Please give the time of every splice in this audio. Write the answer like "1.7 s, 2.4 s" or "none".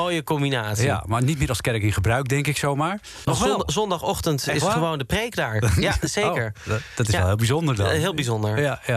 3.2 s